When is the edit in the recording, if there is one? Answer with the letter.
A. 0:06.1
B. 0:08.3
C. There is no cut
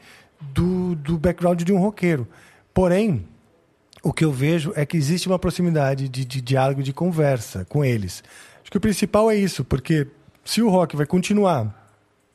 C